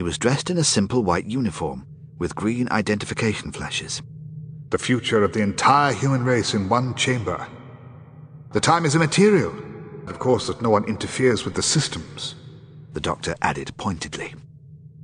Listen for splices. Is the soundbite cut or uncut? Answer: cut